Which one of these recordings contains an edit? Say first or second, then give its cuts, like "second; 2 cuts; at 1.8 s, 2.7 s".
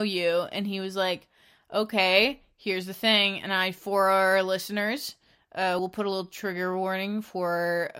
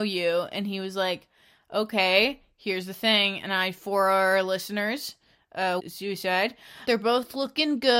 second; 2 cuts; at 5.8 s, 6.9 s